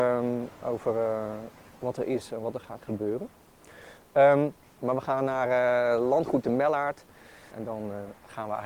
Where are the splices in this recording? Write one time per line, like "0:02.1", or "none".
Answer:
0:04.8
0:07.5